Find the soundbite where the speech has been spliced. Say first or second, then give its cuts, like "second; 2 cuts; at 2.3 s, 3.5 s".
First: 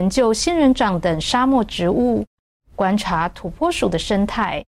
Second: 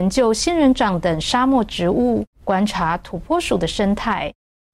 second; 1 cut; at 2.3 s